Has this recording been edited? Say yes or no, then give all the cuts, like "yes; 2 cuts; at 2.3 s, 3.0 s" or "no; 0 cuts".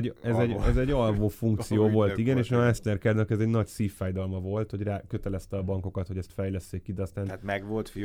no; 0 cuts